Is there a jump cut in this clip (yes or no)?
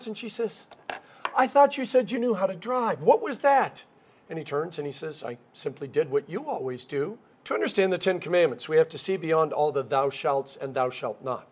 yes